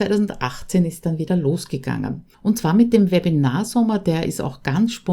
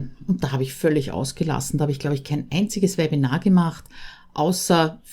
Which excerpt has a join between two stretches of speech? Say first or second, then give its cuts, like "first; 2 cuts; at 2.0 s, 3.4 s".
first; 1 cut; at 2.3 s